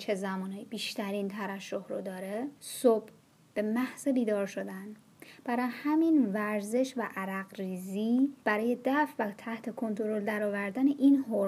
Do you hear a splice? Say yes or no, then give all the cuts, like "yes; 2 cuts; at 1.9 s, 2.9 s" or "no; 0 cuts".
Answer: yes; 2 cuts; at 2.6 s, 8.4 s